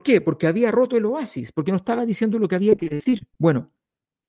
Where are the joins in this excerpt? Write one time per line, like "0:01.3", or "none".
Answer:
0:03.3